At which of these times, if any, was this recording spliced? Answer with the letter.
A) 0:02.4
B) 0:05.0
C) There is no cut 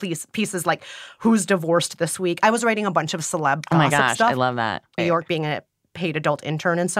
B